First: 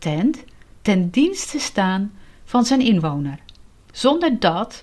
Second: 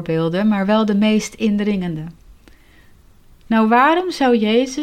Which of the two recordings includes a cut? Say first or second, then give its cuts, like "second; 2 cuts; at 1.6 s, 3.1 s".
first; 1 cut; at 3.9 s